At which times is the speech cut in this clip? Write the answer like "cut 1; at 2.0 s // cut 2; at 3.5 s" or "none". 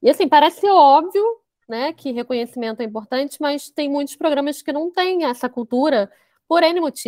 none